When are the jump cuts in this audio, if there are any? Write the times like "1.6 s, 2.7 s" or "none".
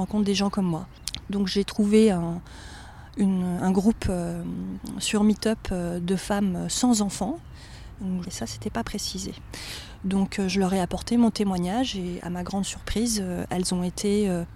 8.2 s